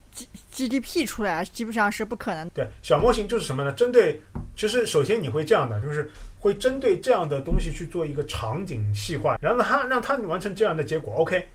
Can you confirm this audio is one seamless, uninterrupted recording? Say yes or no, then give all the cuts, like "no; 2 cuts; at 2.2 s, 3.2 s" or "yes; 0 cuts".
no; 3 cuts; at 2.5 s, 5.8 s, 9.4 s